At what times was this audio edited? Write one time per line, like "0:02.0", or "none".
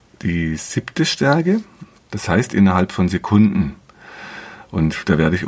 0:02.0